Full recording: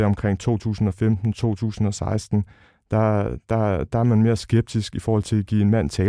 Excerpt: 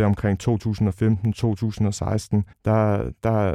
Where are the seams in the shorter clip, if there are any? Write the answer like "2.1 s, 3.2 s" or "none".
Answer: 2.5 s